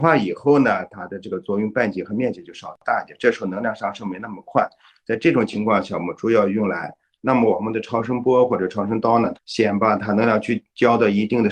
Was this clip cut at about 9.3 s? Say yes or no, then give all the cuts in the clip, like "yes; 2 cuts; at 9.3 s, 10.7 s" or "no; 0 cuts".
yes; 2 cuts; at 7.2 s, 9.3 s